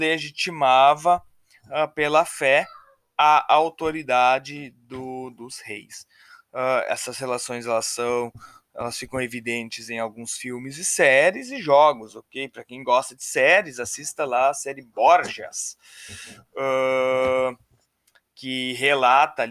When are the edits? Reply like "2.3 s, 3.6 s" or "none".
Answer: none

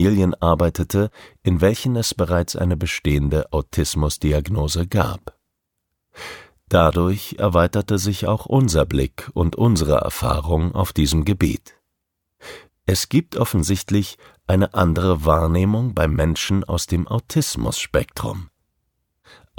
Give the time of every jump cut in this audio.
12.7 s

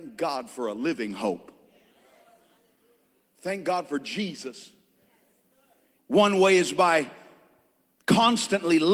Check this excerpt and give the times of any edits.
6.0 s

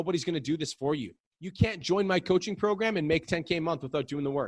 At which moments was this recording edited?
none

